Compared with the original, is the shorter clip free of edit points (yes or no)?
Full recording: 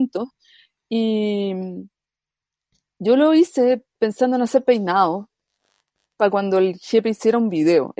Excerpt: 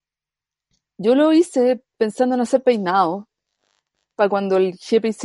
yes